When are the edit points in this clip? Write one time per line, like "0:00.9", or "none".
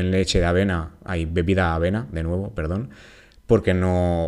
none